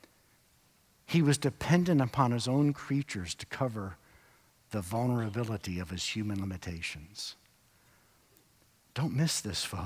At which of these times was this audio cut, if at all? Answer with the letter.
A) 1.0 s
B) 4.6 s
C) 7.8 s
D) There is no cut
D